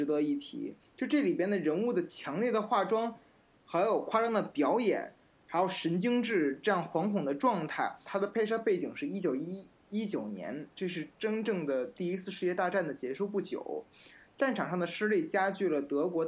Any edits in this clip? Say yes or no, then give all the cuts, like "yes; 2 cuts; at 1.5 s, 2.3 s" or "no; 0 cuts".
yes; 1 cut; at 8.1 s